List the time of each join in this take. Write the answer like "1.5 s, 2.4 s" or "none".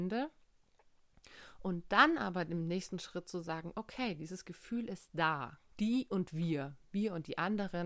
5.7 s